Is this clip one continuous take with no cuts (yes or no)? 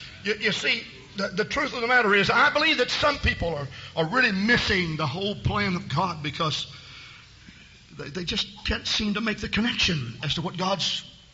yes